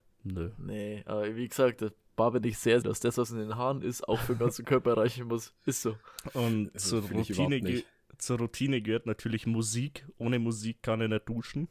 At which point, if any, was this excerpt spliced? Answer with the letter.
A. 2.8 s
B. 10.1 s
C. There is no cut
A